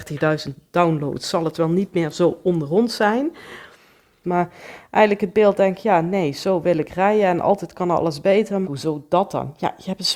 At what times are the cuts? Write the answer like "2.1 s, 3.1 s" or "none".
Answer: 4.2 s, 8.6 s